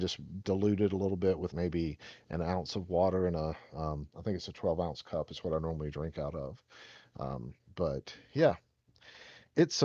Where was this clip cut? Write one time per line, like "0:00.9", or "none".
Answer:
0:01.5